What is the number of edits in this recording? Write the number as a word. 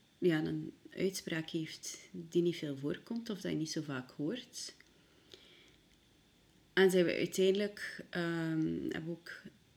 zero